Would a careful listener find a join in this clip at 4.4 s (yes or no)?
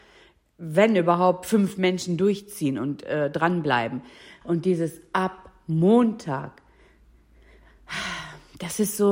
yes